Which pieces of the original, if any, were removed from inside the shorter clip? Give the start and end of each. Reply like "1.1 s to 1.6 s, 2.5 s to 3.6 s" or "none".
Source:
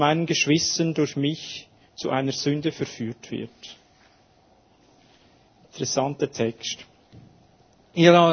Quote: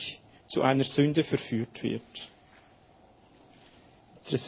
none